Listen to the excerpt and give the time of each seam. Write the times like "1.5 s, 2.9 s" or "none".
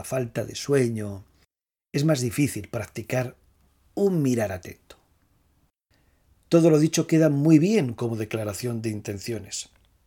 none